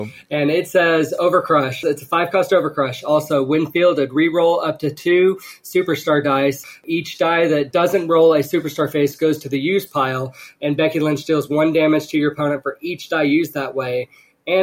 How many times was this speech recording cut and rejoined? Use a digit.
0